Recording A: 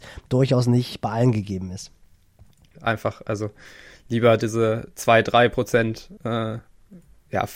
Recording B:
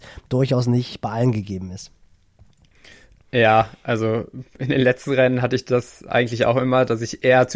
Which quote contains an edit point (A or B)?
A